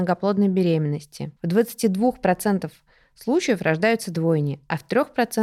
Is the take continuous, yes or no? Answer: no